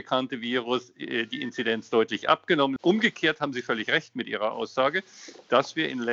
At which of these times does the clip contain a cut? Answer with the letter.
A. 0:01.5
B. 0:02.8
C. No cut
B